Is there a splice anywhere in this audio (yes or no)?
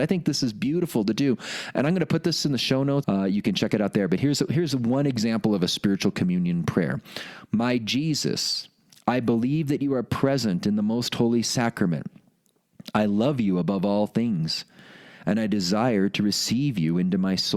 yes